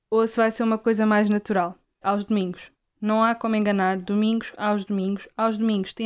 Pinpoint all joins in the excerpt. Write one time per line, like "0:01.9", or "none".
0:02.0